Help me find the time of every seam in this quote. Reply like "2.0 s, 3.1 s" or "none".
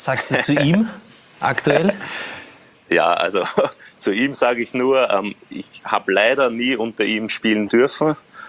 none